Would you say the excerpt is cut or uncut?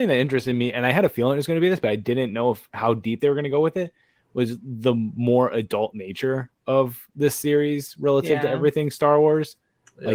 uncut